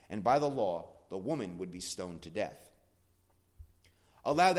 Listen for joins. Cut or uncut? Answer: uncut